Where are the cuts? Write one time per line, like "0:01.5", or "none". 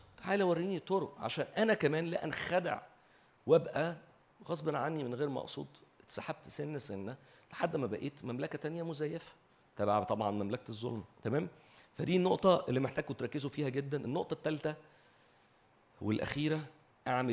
0:11.1